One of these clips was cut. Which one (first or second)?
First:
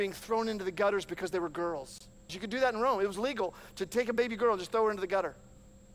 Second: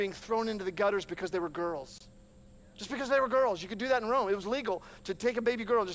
first